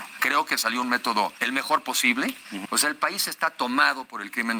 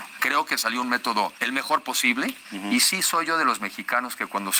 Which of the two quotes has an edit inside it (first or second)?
first